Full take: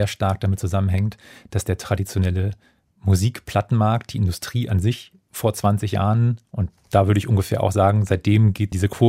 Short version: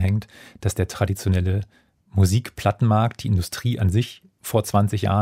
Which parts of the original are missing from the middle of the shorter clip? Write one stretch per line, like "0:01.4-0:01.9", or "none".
none